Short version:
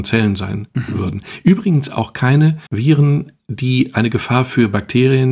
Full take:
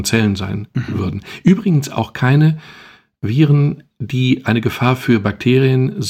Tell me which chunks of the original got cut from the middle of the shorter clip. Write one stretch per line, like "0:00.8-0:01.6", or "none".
0:02.7-0:03.2